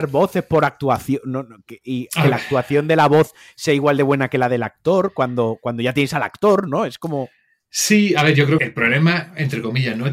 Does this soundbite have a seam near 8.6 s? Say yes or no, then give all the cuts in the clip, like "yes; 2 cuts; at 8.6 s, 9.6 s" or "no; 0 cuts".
yes; 1 cut; at 8.6 s